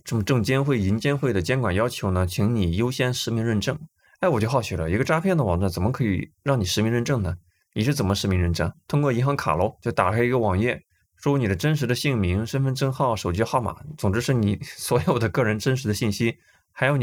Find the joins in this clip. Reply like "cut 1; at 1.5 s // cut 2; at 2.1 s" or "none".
cut 1; at 9.8 s